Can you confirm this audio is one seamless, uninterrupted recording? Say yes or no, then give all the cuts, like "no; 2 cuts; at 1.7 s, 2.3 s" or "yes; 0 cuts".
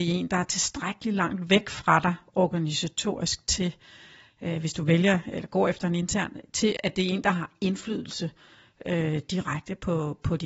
no; 1 cut; at 6.8 s